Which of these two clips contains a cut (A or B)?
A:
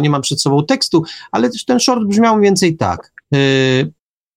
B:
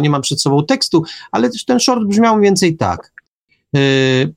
A